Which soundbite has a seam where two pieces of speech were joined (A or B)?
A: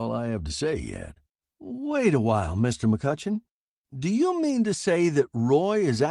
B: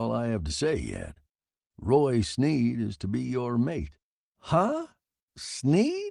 A